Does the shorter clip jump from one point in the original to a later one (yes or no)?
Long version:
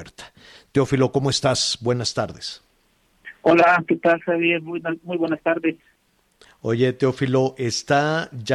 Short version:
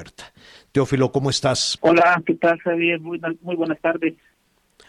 yes